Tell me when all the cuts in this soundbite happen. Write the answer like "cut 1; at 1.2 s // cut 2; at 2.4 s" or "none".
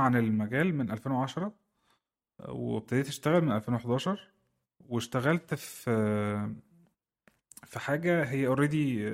none